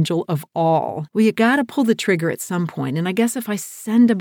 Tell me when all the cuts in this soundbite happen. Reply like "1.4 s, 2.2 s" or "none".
1.1 s